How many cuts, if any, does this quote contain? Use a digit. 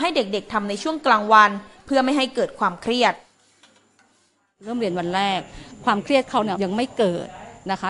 1